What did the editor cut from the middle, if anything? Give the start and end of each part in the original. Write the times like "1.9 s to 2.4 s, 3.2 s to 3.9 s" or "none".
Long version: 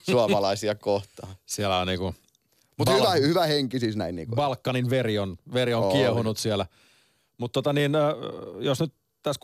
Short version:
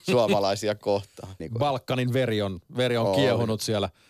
1.4 s to 4.2 s